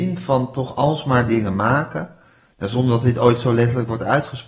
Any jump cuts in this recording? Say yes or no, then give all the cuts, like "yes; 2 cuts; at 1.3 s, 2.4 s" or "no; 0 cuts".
no; 0 cuts